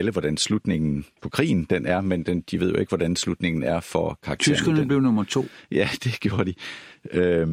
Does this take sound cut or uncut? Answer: uncut